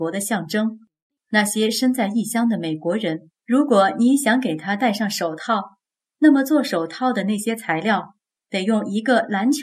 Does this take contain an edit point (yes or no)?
yes